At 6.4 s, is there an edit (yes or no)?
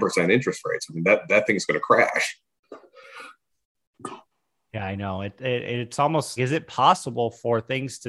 yes